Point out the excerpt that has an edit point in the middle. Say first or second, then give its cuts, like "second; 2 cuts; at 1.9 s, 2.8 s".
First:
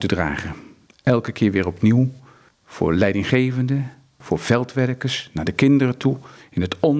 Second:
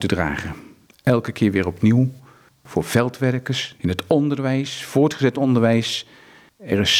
second; 2 cuts; at 2.5 s, 3.8 s